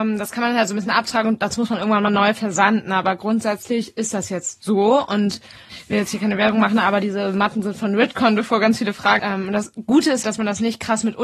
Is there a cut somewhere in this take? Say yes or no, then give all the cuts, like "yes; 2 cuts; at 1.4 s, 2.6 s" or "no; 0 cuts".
yes; 2 cuts; at 9.2 s, 10.2 s